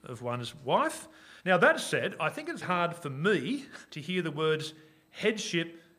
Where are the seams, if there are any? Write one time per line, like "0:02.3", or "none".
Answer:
0:01.4
0:02.6
0:03.9